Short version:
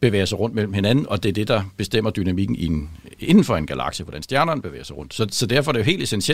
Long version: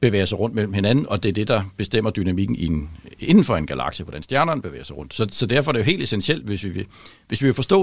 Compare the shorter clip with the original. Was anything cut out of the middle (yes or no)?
no